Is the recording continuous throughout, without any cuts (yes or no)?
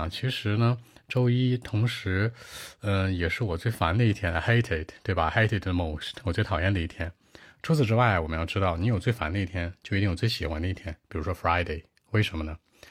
yes